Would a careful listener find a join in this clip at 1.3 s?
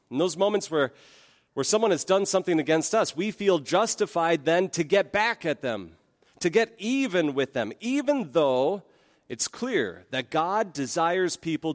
no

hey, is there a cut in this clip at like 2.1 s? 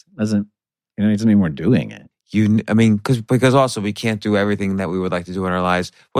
yes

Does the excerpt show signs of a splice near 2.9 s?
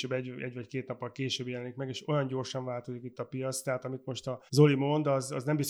no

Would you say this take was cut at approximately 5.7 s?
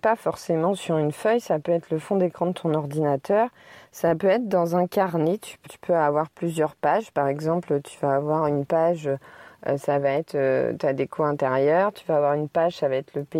yes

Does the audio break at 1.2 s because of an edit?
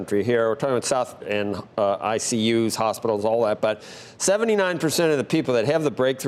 yes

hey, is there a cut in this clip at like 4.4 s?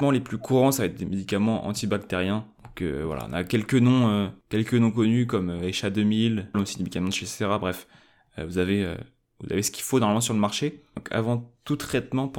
no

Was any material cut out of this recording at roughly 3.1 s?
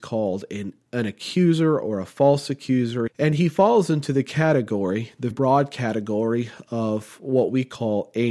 yes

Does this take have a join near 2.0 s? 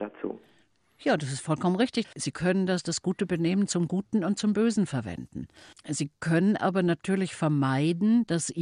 yes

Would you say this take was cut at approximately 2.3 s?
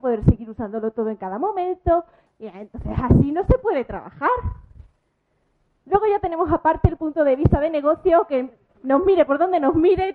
yes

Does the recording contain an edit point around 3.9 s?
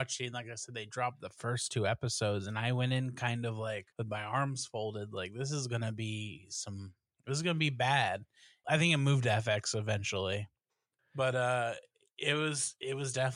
yes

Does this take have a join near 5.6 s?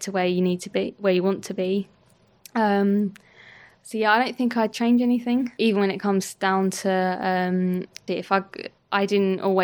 yes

